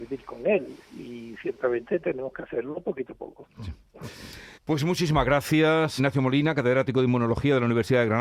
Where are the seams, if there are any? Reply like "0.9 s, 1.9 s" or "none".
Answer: 4.5 s, 6.0 s